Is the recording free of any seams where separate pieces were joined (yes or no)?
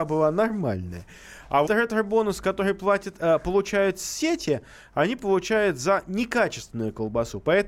no